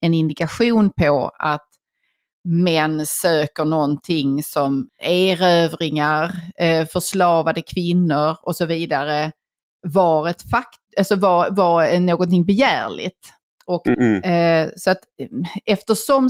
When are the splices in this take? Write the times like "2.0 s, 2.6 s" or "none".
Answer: 4.9 s, 13.9 s